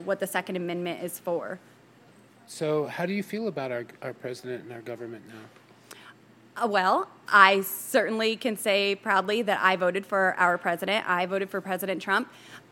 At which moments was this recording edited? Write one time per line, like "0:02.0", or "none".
none